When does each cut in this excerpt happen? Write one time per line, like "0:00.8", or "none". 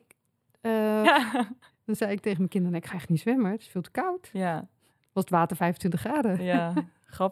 0:01.0